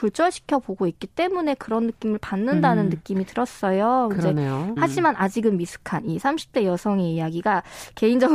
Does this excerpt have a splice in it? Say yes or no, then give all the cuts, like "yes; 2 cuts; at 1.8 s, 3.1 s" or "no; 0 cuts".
yes; 1 cut; at 4.8 s